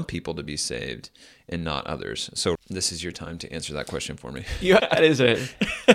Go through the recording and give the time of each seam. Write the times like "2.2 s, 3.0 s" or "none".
2.5 s, 4.8 s